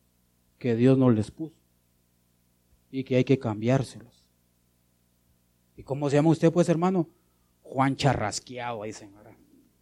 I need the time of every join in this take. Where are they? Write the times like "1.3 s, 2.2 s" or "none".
none